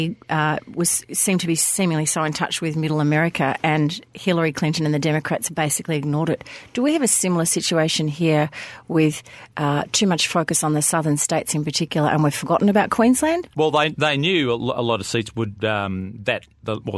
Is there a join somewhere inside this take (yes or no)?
yes